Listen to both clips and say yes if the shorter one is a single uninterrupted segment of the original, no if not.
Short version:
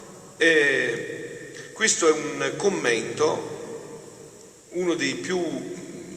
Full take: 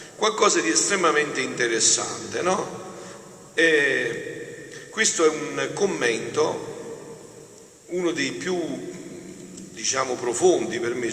yes